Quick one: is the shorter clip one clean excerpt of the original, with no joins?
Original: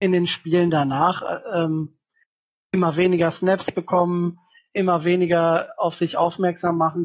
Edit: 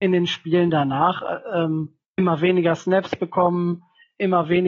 no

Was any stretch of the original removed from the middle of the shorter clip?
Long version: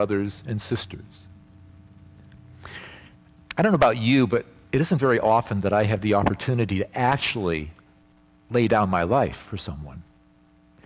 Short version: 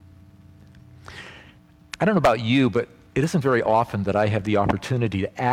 no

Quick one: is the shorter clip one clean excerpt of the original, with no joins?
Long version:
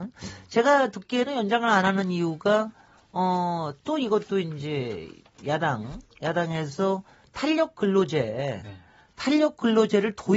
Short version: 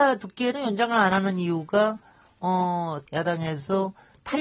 no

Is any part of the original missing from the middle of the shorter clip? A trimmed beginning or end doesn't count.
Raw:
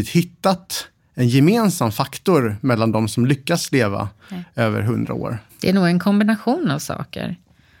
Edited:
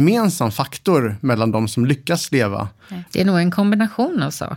yes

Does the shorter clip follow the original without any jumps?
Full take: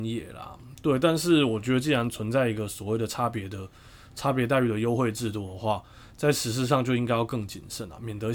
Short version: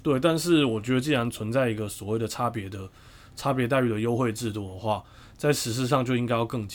yes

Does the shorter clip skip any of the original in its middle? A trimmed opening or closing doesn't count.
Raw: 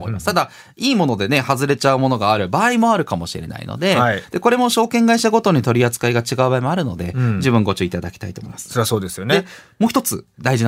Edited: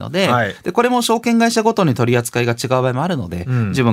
no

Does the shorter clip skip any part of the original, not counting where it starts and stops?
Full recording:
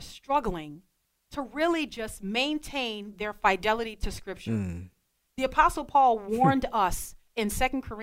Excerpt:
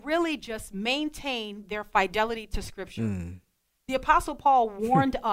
no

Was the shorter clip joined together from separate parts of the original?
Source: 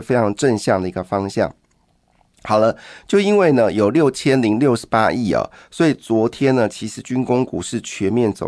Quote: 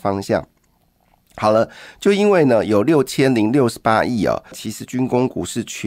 yes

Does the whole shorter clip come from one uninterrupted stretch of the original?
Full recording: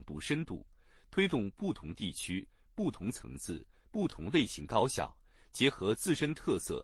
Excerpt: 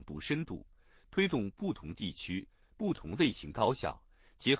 no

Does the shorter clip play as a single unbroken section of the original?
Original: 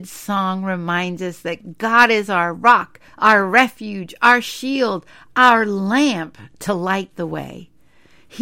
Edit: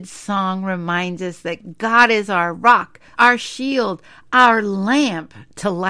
no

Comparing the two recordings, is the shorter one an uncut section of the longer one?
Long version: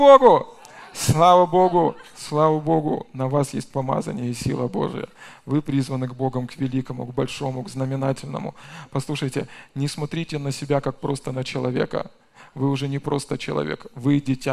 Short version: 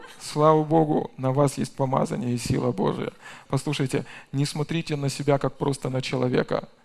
no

